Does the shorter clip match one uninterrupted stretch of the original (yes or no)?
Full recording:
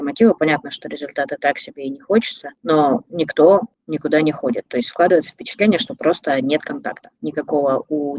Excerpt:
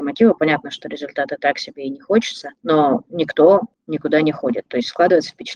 yes